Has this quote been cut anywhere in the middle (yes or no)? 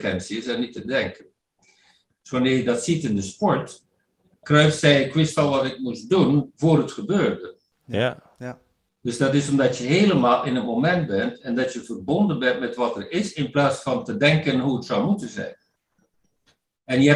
yes